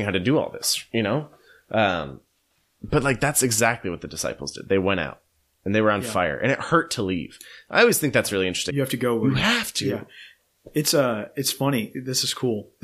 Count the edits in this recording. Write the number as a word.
one